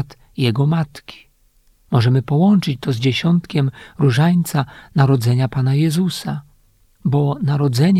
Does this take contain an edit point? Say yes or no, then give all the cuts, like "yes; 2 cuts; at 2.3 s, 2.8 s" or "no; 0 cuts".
no; 0 cuts